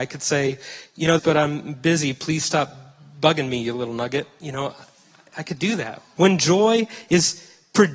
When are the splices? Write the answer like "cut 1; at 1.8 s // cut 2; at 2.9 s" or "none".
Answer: cut 1; at 1.2 s // cut 2; at 6.2 s